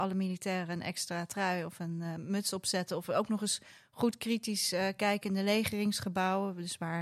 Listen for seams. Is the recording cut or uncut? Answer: uncut